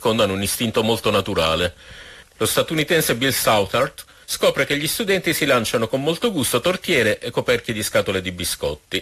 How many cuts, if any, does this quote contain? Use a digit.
2